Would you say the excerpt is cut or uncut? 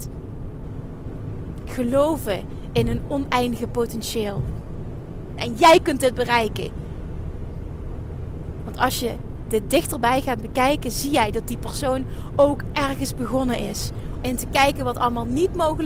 cut